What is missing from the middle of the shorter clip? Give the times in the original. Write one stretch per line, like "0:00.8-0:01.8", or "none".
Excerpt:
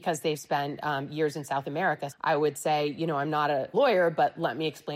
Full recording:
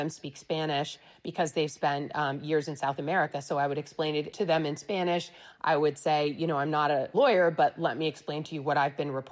0:03.4-0:05.5